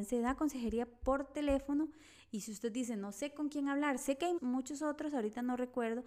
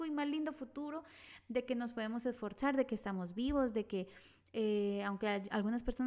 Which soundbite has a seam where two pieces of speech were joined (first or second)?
first